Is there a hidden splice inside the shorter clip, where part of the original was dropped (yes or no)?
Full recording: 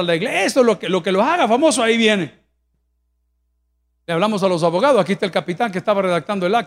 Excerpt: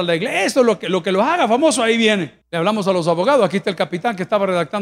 yes